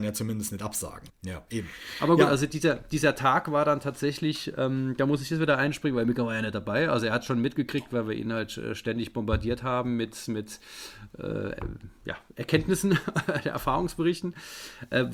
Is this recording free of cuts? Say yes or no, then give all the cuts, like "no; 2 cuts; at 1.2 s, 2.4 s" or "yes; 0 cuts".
no; 1 cut; at 1.1 s